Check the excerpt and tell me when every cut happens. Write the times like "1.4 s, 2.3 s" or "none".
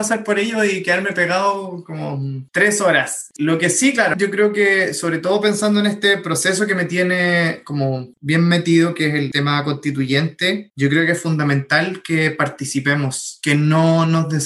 4.1 s